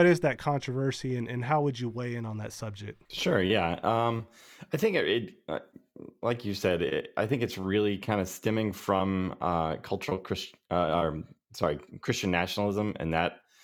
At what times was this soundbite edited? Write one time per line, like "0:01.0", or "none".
0:03.1

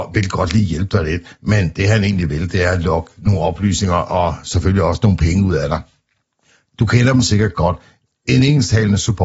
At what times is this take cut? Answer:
0:06.7

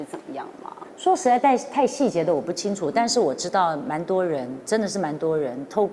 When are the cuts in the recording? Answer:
none

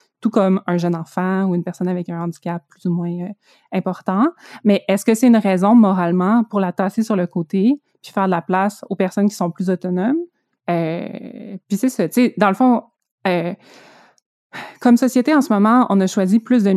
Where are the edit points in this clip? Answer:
0:10.6

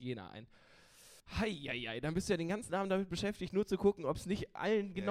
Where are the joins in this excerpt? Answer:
0:01.2

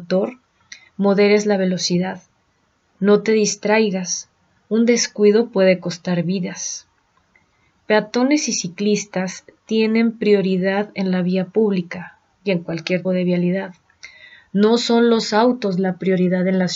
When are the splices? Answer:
0:13.0

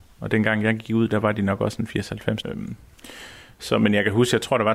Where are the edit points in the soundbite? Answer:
0:02.4

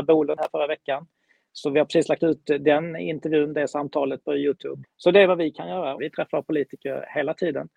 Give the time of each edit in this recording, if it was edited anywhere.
0:04.8
0:06.0

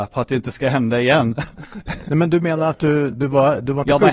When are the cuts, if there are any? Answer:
none

